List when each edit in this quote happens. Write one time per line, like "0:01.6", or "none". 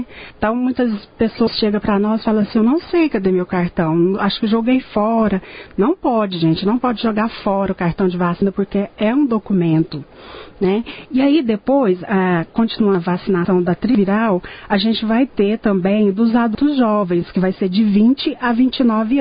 none